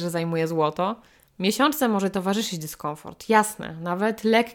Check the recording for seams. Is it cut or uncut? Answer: cut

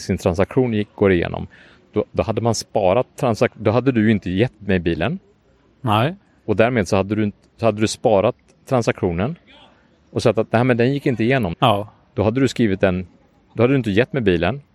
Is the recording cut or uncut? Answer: cut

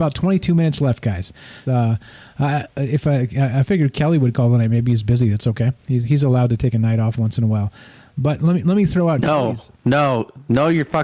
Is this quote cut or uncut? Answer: cut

